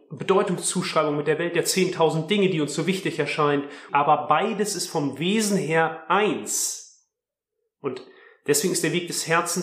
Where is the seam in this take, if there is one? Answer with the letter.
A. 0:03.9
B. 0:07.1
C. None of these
A